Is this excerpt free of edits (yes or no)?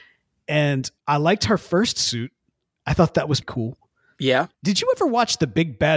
no